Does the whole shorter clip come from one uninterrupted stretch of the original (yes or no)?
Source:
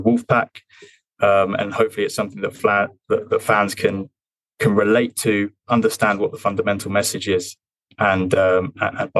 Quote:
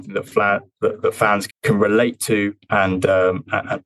no